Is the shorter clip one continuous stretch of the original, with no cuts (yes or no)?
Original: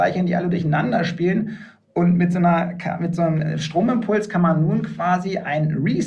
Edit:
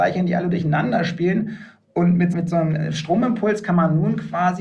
no